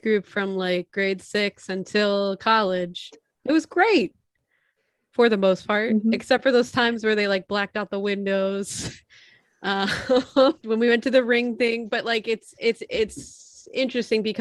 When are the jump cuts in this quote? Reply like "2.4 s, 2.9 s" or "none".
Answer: 10.6 s